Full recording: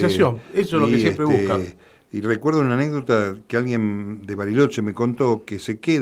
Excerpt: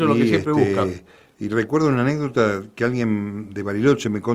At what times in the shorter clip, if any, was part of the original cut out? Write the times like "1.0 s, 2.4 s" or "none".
none